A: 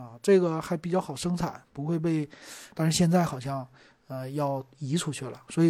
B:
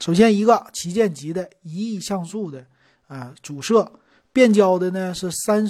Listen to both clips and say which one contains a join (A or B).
A